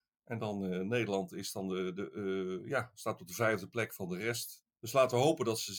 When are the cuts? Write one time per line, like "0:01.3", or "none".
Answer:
0:04.6